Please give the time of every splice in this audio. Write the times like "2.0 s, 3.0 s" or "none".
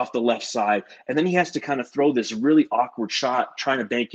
none